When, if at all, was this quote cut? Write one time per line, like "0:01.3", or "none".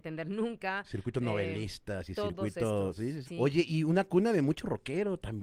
0:03.2